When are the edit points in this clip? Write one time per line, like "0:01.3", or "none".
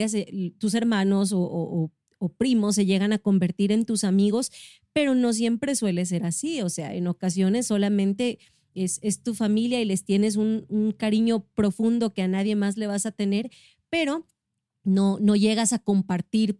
none